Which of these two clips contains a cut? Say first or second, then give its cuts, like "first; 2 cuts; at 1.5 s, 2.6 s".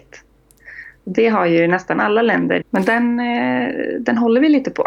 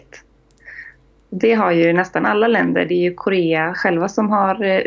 first; 2 cuts; at 1.0 s, 2.6 s